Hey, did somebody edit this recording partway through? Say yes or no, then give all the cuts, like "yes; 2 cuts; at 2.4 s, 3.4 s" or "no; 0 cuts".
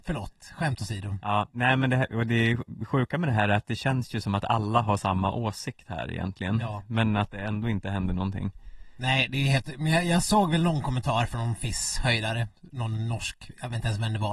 no; 0 cuts